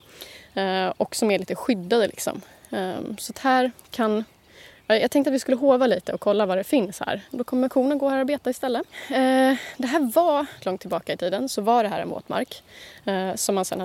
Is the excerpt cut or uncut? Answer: cut